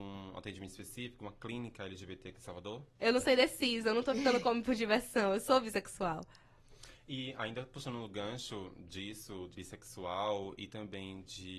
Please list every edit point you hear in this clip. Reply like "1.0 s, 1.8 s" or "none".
3.0 s, 9.5 s